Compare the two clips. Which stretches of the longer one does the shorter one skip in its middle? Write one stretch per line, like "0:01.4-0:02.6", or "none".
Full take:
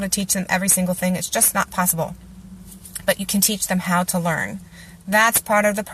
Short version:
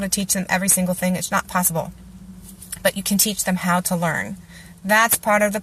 0:01.3-0:01.5

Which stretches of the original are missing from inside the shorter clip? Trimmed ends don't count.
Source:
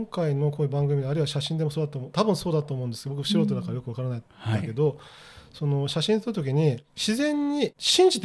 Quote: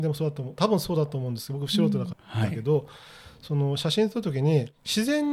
0:03.7-0:04.2

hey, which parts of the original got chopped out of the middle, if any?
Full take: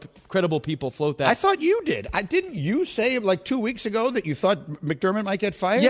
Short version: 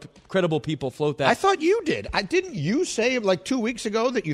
none

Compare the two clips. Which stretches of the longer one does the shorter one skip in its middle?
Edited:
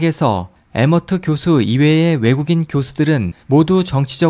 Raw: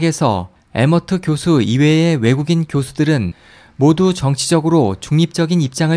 0:03.4-0:03.7

